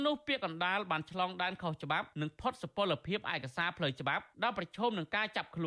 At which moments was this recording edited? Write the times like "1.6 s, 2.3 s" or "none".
2.1 s, 4.3 s